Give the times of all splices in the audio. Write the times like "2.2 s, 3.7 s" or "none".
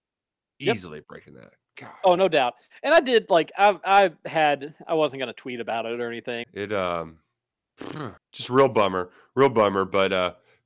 6.4 s, 8.2 s